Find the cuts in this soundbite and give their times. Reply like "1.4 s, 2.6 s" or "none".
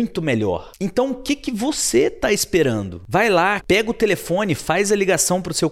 3.6 s